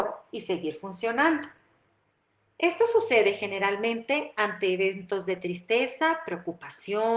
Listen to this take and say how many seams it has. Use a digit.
0